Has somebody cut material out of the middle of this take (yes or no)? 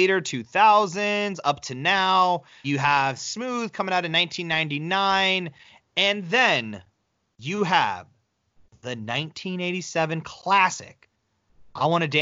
no